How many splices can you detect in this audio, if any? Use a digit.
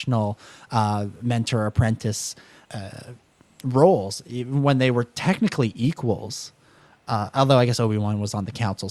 1